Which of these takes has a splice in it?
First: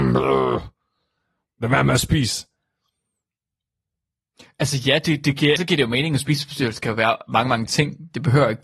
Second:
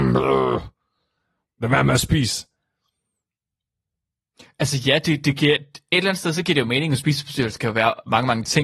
first; 1 cut; at 5.6 s

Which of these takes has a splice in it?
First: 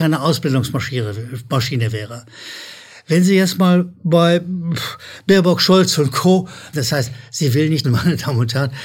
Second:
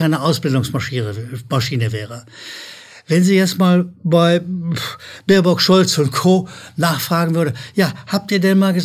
first; 2 cuts; at 6.7 s, 7.8 s

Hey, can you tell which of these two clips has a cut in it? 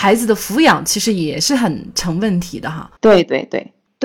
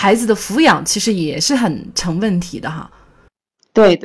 first; 1 cut; at 3.0 s

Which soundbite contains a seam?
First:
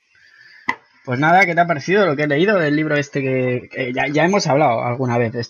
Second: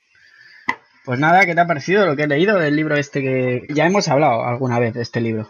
second; 1 cut; at 3.7 s

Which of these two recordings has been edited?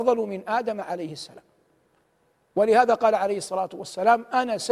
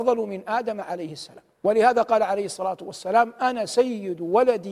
second; 1 cut; at 1.5 s

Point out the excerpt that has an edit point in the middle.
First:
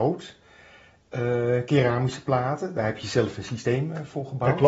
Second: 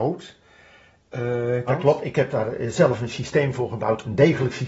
second; 1 cut; at 1.7 s

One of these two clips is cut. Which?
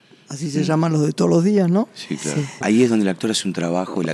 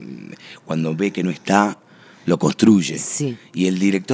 first; 1 cut; at 2.6 s

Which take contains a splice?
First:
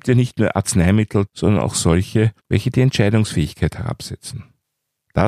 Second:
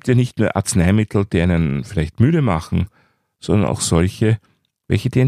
first; 2 cuts; at 1.3 s, 2.4 s

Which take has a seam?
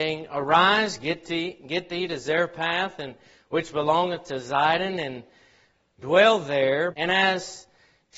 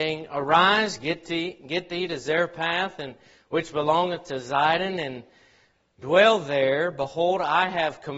first; 1 cut; at 6.9 s

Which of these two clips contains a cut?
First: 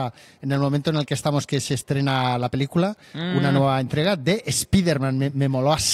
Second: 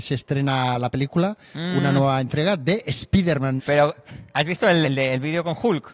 second; 2 cuts; at 3.6 s, 4.8 s

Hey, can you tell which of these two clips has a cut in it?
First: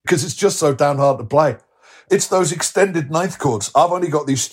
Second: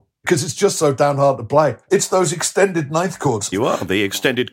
second; 2 cuts; at 1.8 s, 3.5 s

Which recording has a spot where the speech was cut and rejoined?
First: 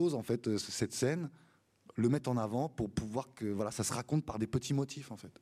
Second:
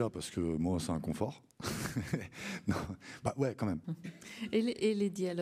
second; 1 cut; at 3.8 s

